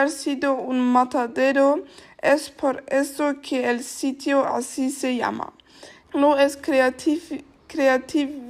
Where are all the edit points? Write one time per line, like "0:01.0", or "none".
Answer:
0:06.0